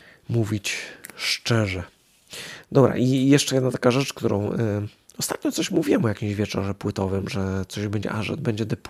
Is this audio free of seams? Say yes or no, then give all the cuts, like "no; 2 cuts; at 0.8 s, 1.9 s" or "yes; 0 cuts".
yes; 0 cuts